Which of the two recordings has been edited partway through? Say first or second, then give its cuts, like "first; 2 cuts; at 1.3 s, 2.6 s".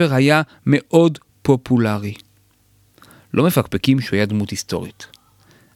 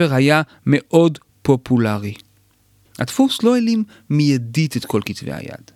second; 1 cut; at 2.8 s